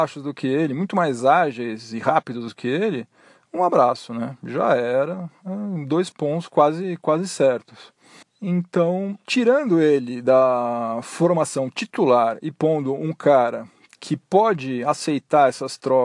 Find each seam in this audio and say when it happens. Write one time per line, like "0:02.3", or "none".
0:08.2